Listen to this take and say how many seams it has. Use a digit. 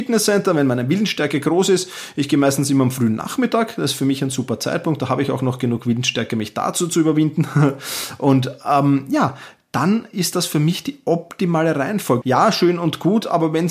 1